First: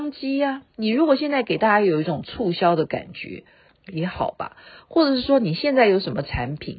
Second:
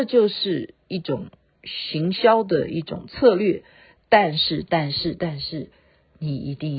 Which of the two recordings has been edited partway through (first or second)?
first